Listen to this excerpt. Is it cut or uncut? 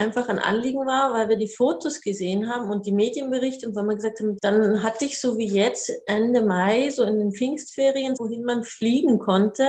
cut